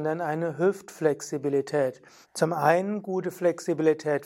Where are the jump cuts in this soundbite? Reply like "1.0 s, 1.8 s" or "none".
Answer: 2.2 s